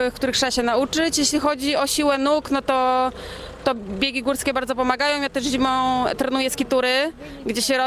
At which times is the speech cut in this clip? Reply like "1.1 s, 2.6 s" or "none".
none